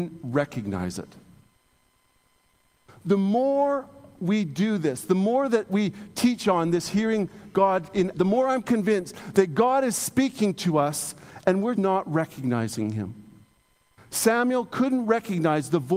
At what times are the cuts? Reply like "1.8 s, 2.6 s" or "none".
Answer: 8.1 s, 11.8 s